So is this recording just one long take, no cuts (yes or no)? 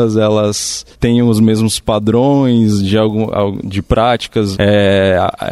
no